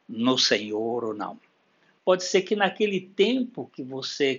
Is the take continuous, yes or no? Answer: no